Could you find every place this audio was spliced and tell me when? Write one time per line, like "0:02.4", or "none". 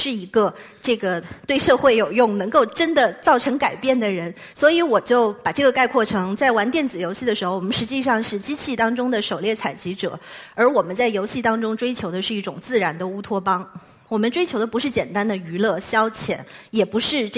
0:04.5
0:14.1